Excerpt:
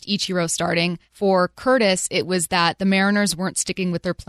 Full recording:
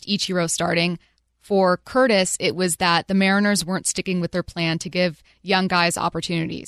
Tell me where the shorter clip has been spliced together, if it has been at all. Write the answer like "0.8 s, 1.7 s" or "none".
1.1 s